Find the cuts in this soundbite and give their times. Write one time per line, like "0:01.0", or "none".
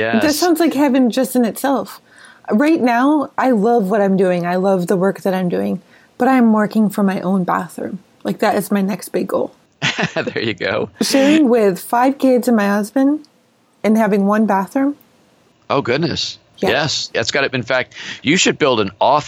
0:17.1